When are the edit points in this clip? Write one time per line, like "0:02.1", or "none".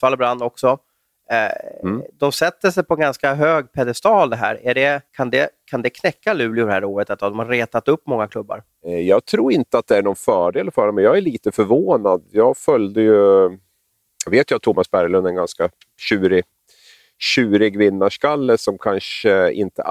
0:05.1